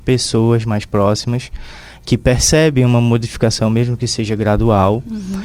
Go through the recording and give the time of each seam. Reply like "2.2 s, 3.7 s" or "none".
none